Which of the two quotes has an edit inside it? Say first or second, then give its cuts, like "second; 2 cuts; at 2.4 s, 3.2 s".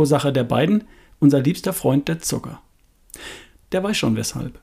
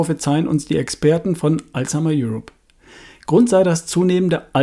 first; 1 cut; at 3.6 s